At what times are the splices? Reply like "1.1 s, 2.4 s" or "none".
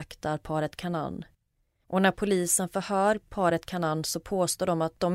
1.8 s